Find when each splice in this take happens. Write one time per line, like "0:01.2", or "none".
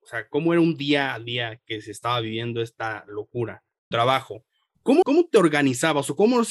0:03.9
0:05.0

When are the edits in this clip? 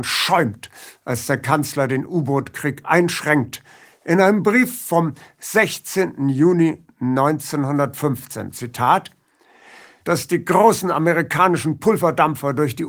0:10.0

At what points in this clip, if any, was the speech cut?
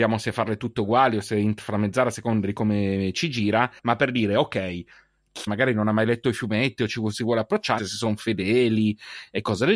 0:03.8
0:05.5
0:07.8

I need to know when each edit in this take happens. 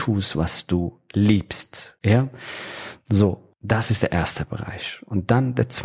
0:02.0

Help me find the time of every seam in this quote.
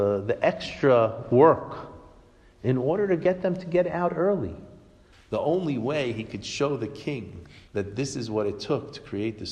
0:05.1
0:07.7

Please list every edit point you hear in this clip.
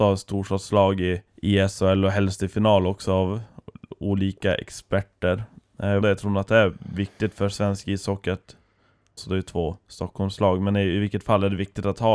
0:01.3
0:06.0
0:09.2

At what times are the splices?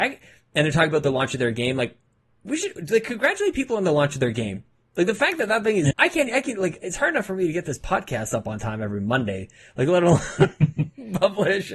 0:05.9

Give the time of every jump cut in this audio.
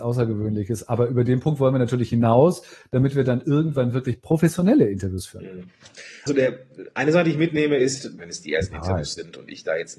0:06.3
0:08.2

